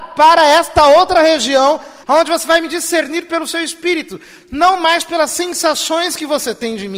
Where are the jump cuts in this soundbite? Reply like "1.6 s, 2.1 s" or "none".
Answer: 2.0 s, 4.4 s